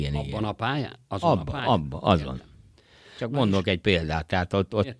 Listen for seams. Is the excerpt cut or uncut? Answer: uncut